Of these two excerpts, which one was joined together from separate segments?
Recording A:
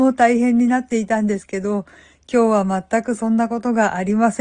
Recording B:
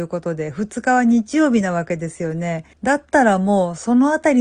B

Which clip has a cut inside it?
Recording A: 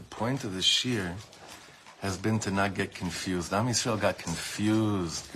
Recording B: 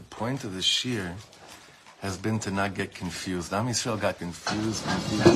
B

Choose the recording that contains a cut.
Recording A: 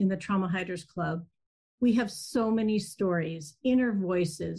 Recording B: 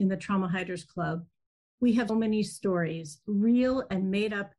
B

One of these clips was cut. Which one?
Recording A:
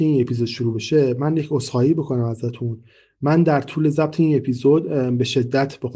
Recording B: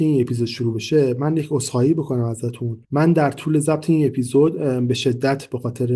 B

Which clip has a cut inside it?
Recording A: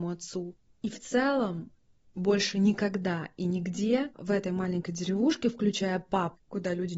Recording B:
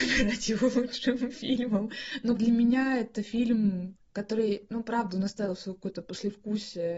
B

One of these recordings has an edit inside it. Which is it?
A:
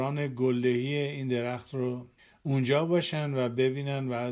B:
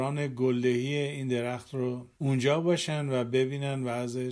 B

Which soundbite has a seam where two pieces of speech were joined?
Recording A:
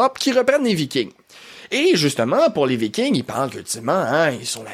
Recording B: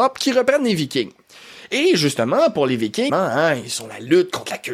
B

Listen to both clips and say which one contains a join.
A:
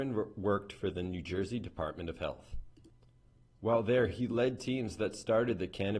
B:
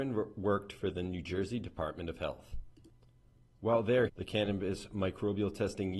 B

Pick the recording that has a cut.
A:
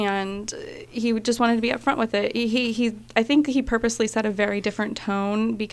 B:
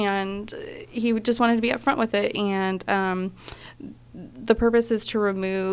B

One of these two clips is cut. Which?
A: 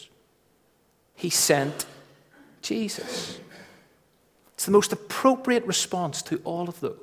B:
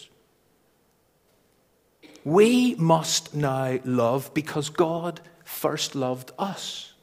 A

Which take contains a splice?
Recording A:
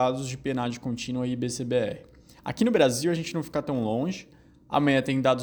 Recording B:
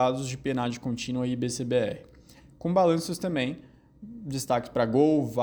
A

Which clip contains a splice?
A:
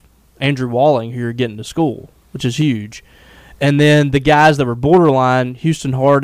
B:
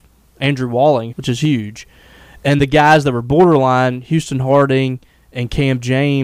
B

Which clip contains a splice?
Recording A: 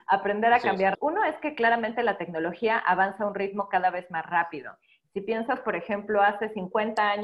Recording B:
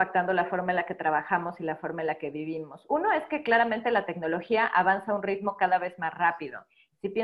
A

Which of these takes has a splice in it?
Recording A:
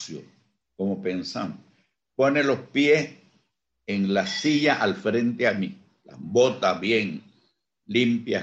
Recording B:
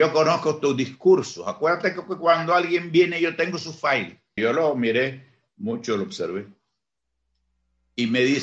B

